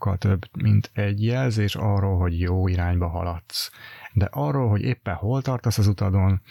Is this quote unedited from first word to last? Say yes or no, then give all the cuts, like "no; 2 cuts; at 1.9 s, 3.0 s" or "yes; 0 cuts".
no; 1 cut; at 4.1 s